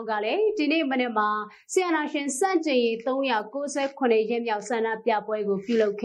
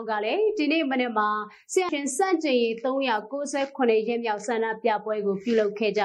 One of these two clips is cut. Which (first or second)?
second